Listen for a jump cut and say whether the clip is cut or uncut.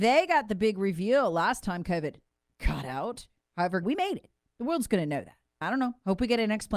cut